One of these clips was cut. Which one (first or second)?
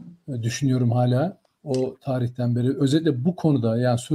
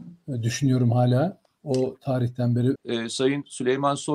second